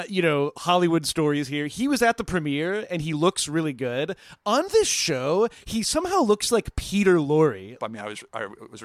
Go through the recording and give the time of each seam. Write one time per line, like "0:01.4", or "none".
0:07.8